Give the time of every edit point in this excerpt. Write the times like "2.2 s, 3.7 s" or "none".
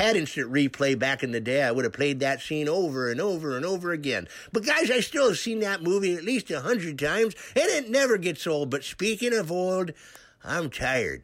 none